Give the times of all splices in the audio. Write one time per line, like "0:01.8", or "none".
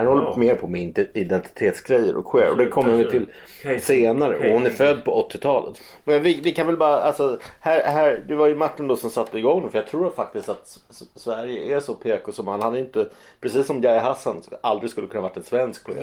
none